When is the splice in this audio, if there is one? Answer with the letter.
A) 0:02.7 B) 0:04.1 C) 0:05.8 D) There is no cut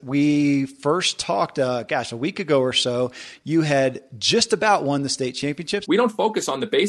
C